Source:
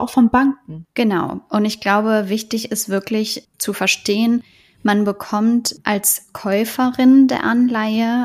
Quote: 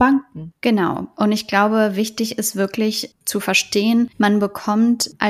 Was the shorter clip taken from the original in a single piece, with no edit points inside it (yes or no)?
no